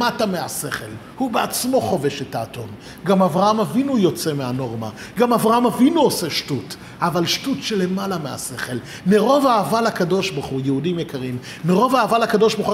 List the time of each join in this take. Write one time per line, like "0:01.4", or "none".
none